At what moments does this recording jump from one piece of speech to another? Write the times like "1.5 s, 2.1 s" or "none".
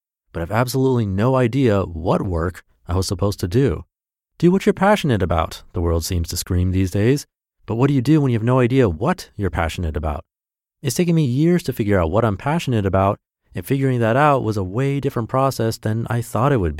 none